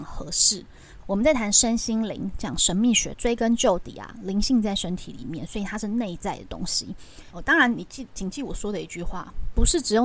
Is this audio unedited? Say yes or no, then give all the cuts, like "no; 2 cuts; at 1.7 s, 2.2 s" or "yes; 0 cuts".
no; 2 cuts; at 1.0 s, 7.3 s